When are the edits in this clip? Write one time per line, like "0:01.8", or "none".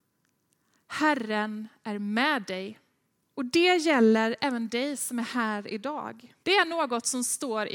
0:03.2
0:06.4